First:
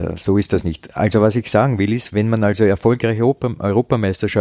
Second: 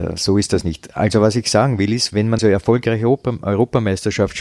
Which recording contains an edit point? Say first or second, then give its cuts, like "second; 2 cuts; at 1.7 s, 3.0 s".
second; 1 cut; at 2.4 s